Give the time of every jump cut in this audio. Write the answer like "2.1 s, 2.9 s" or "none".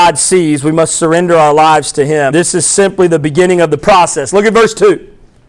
2.3 s